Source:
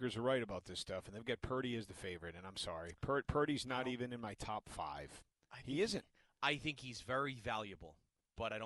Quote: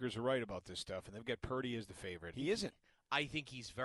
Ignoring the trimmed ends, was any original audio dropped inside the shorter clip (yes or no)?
yes